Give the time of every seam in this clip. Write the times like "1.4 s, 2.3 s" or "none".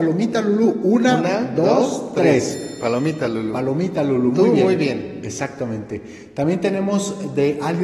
none